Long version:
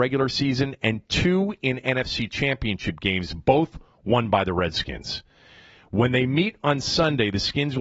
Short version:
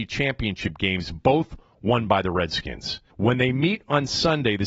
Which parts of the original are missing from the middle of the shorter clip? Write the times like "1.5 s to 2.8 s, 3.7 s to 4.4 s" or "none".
5.3 s to 5.8 s

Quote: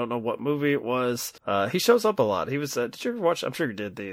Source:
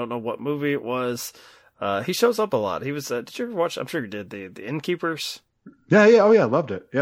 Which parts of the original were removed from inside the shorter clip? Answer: 1.4 s to 1.7 s

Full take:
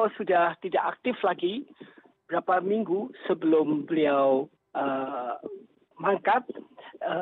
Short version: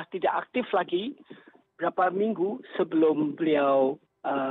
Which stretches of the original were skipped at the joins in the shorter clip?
none

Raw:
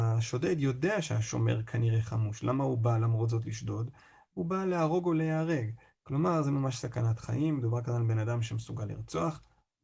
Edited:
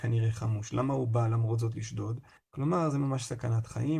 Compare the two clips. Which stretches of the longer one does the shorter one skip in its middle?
4.1 s to 5.9 s

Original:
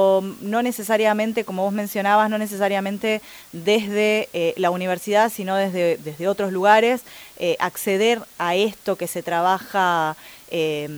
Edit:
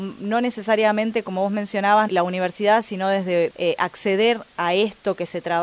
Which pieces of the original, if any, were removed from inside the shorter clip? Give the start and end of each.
2.3 s to 4.5 s, 6.0 s to 7.3 s

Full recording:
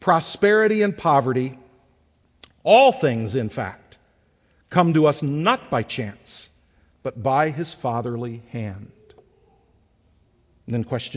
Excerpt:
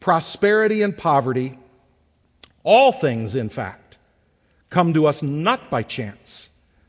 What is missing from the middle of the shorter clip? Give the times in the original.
none

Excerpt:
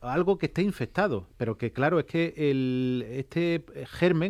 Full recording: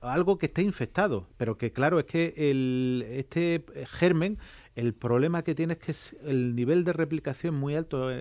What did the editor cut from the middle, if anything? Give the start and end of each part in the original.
none

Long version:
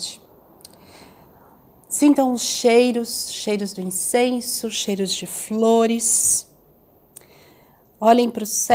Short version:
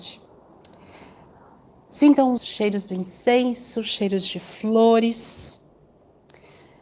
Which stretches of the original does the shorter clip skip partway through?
2.4 s to 3.2 s

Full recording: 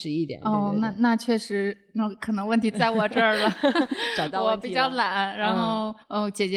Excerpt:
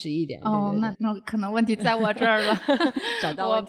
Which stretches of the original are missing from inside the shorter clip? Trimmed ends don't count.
0.9 s to 1.9 s

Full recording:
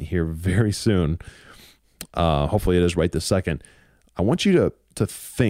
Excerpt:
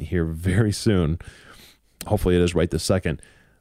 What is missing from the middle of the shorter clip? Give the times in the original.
2.1 s to 2.5 s

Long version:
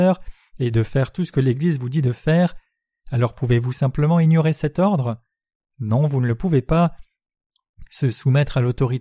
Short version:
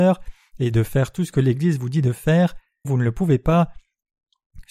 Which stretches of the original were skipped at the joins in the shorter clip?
2.8 s to 6.1 s

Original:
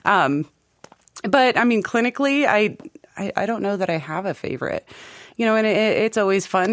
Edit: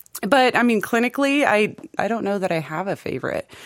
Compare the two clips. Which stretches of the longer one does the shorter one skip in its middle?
3.0 s to 3.4 s

